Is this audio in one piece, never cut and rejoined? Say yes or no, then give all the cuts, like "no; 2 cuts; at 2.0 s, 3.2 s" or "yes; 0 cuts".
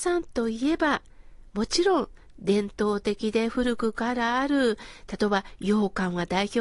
yes; 0 cuts